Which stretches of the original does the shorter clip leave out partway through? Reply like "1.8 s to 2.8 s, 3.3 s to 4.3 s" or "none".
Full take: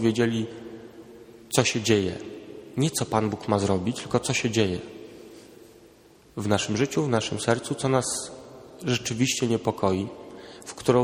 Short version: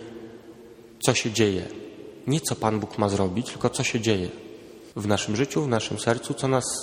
5.4 s to 6.3 s